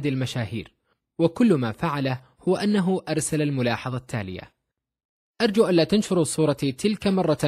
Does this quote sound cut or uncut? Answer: uncut